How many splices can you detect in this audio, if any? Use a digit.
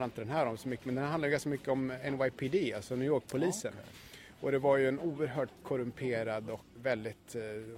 2